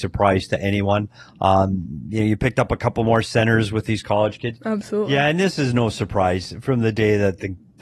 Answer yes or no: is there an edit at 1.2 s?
no